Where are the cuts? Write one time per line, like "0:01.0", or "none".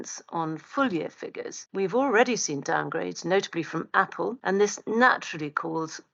none